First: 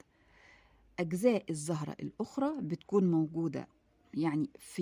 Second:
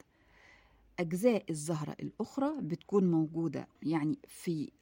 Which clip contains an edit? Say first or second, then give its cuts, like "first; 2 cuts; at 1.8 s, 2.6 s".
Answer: second; 1 cut; at 3.8 s